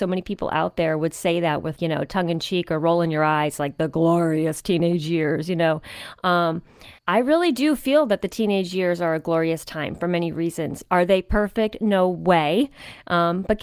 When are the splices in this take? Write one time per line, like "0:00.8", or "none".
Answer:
0:01.8
0:07.0